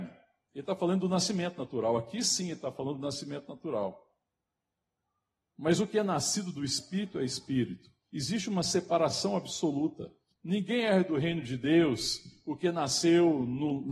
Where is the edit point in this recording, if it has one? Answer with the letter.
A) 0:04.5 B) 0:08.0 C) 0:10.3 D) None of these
C